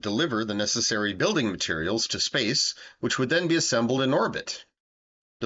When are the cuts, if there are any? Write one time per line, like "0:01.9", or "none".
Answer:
none